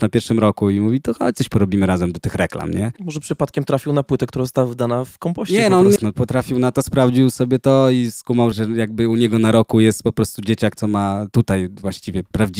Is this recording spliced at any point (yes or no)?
yes